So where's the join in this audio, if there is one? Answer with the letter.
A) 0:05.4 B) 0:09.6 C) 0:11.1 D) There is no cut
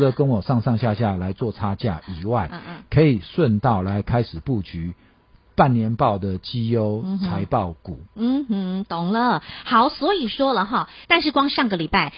C